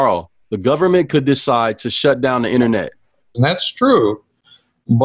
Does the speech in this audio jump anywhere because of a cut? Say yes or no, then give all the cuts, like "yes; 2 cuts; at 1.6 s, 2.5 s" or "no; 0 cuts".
yes; 1 cut; at 3.3 s